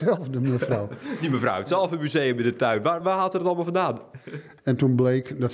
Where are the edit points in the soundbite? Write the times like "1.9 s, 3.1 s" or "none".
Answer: 3.0 s, 4.6 s